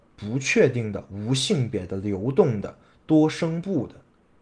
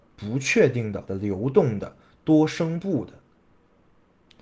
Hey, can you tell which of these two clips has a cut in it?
second; 1 cut; at 1.1 s

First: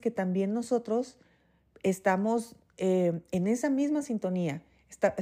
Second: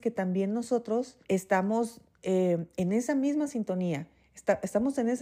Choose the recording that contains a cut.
second; 1 cut; at 1.2 s

